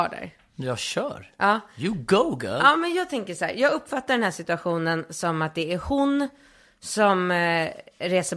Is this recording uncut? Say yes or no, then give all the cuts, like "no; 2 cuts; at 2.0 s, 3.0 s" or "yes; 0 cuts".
yes; 0 cuts